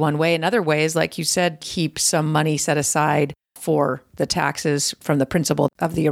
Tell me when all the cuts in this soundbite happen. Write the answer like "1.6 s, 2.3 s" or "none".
1.6 s